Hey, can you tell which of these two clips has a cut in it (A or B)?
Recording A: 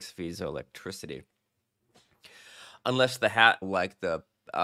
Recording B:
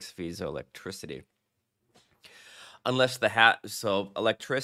A